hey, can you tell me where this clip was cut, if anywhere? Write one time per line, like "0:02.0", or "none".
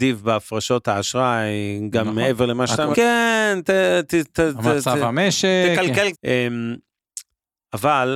0:02.9
0:06.1